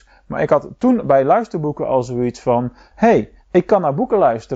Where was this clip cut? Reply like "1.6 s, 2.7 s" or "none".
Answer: 3.4 s